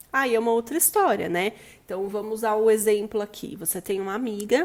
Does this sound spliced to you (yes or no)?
no